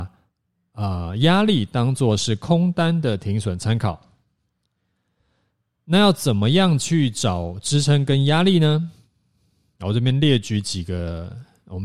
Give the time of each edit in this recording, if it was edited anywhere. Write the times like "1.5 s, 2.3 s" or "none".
none